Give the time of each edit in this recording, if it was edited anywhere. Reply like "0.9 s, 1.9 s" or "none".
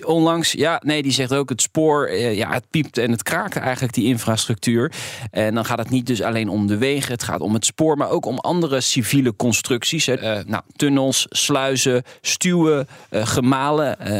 10.2 s